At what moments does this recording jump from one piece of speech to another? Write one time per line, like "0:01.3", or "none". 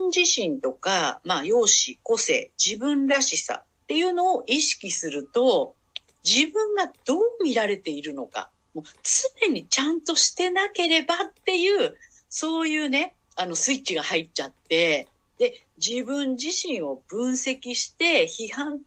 none